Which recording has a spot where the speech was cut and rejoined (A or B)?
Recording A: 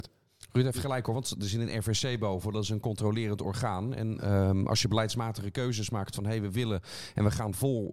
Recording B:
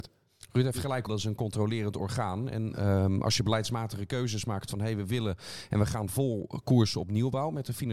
B